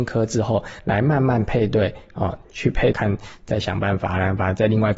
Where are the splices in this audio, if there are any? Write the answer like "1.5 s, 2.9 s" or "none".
2.9 s